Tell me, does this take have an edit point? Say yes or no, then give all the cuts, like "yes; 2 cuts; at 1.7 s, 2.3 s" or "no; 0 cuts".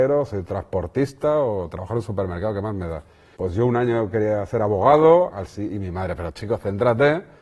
yes; 2 cuts; at 3.4 s, 5.3 s